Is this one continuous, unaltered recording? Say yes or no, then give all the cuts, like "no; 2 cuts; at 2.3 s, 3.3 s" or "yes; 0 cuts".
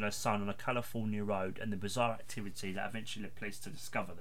yes; 0 cuts